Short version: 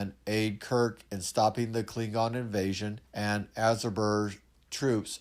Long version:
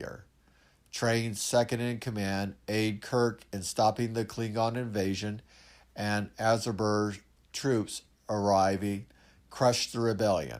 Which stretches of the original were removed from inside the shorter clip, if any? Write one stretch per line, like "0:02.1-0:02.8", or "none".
0:05.5-0:05.9